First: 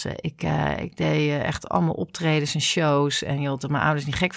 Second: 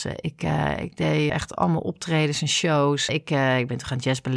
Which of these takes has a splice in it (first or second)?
second